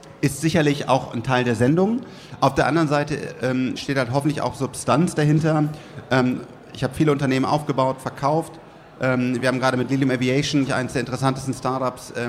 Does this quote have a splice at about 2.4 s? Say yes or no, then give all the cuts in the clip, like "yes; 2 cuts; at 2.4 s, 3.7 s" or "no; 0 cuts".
no; 1 cut; at 10.7 s